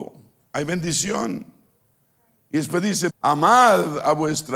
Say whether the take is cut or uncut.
cut